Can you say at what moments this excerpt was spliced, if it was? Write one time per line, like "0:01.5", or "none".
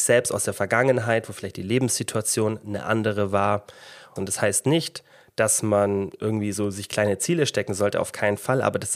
0:04.2